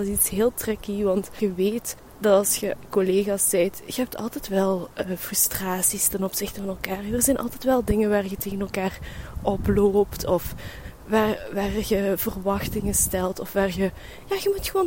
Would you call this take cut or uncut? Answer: uncut